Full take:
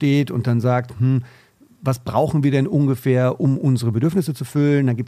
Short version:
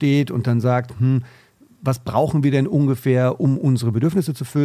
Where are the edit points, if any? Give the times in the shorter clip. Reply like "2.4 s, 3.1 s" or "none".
none